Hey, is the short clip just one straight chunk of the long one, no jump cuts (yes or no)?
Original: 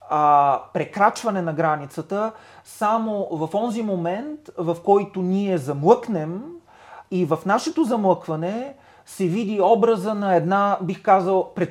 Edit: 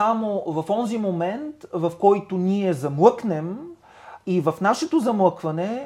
yes